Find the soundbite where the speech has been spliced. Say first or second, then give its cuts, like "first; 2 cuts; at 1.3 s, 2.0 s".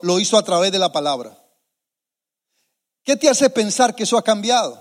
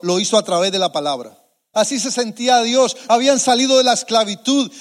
second; 2 cuts; at 1.7 s, 3.1 s